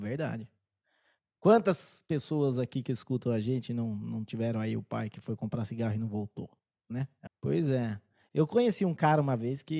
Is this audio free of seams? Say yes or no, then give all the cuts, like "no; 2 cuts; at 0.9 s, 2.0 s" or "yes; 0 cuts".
no; 1 cut; at 7.3 s